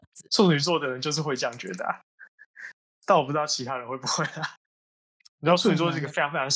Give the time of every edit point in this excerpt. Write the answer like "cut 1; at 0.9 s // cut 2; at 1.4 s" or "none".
cut 1; at 5.2 s